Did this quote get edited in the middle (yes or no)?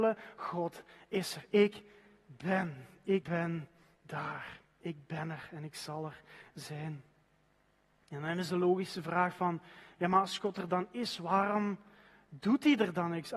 yes